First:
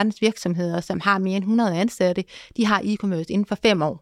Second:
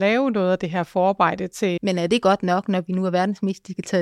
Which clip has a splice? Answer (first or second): second